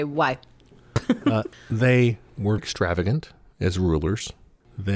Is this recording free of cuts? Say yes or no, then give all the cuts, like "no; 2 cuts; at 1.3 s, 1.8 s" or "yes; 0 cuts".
no; 2 cuts; at 1.5 s, 2.6 s